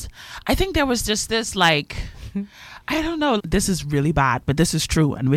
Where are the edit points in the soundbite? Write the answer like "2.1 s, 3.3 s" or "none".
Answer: 3.4 s